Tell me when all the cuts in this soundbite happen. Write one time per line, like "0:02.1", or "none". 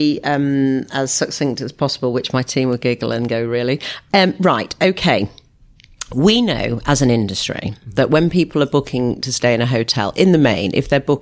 none